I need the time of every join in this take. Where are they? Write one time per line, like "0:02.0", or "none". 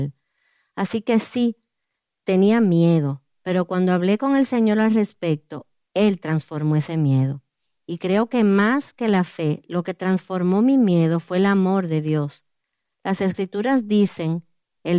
none